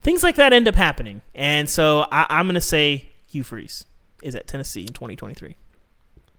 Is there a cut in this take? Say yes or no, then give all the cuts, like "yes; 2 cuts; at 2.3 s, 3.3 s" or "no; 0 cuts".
no; 0 cuts